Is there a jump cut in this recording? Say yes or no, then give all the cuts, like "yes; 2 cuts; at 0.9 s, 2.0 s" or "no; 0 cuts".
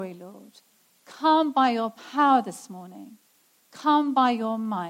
no; 0 cuts